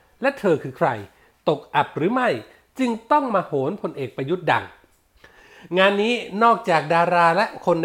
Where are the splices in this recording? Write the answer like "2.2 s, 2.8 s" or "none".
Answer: none